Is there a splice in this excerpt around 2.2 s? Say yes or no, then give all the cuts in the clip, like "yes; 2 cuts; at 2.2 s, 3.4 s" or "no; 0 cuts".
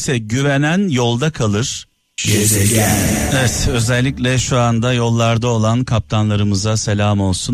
yes; 1 cut; at 2.2 s